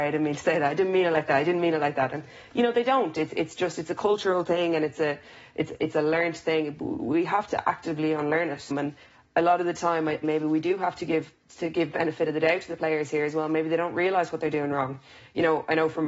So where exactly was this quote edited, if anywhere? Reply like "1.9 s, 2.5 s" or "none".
8.7 s, 10.2 s